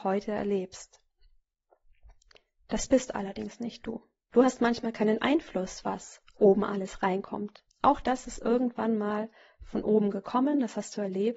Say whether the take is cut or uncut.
cut